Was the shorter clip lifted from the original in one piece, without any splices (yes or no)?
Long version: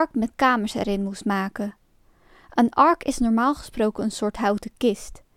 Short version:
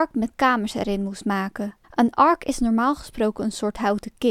no